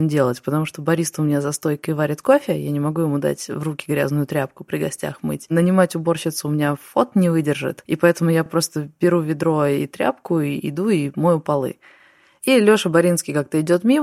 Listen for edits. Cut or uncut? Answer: uncut